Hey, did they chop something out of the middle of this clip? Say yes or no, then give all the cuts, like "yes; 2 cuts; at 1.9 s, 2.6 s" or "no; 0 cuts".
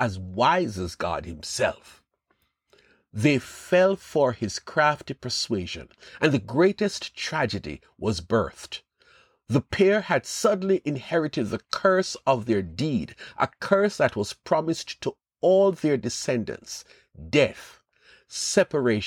no; 0 cuts